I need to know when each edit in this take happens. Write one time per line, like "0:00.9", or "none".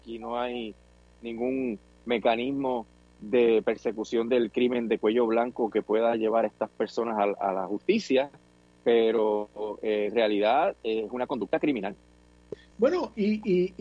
none